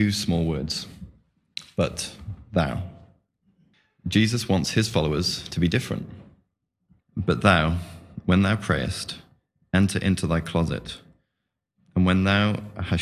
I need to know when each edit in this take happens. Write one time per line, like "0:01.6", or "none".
0:07.0